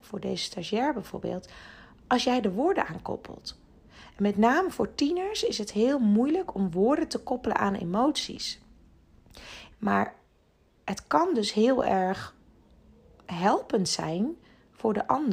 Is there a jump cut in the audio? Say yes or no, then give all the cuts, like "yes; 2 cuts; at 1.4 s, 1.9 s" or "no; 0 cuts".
yes; 1 cut; at 9.7 s